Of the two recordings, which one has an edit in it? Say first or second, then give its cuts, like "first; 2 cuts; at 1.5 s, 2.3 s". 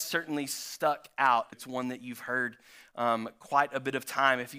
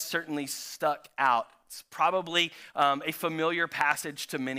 first; 1 cut; at 1.5 s